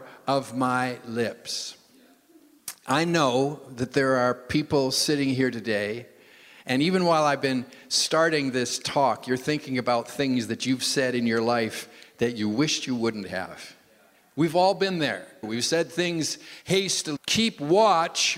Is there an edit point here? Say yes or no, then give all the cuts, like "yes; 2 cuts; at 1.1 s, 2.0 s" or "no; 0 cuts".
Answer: yes; 2 cuts; at 15.4 s, 17.2 s